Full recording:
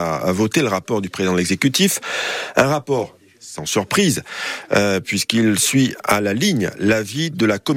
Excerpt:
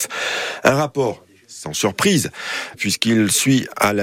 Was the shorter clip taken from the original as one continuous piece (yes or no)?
no